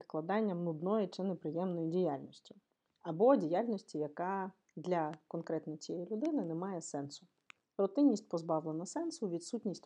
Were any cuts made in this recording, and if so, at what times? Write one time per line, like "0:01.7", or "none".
none